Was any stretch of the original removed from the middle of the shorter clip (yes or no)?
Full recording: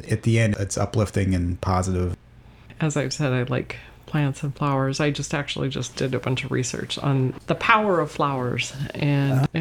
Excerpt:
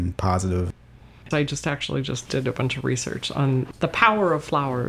yes